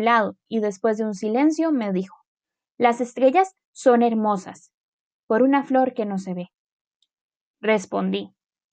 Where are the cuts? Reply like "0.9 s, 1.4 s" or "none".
none